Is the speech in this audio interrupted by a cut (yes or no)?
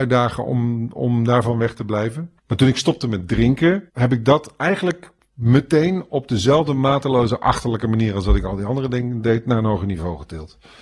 yes